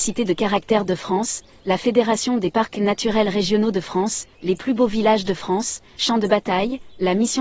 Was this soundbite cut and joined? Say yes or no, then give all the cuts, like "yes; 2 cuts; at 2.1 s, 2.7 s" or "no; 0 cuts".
yes; 2 cuts; at 4.3 s, 6.0 s